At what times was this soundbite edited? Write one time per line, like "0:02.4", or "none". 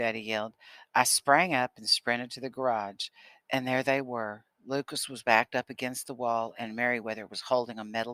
none